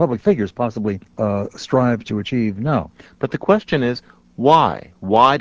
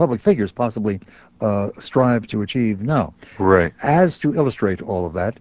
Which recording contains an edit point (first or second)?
first